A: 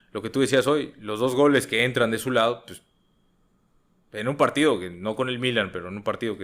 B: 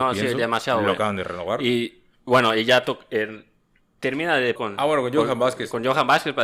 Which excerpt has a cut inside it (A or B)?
B